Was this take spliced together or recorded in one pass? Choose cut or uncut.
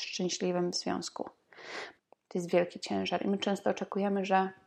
cut